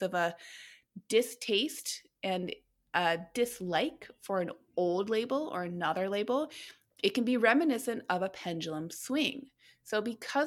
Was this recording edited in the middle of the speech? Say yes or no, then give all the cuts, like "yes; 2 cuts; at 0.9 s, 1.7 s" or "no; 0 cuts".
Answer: no; 0 cuts